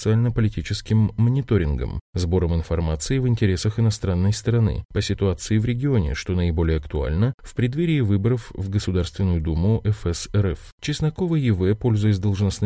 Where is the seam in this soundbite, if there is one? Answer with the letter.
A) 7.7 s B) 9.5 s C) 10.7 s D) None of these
C